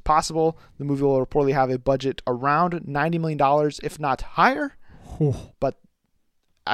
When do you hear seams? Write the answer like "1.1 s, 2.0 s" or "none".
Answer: 5.5 s